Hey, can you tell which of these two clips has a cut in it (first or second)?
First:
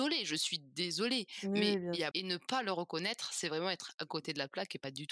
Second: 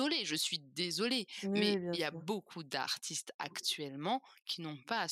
first